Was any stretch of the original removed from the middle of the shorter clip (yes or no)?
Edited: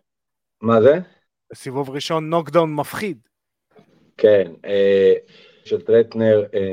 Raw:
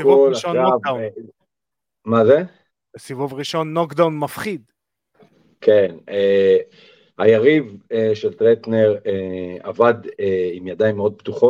yes